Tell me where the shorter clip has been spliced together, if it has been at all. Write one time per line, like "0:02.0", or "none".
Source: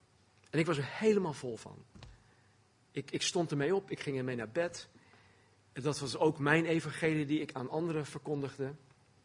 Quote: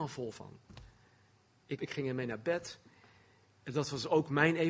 0:01.8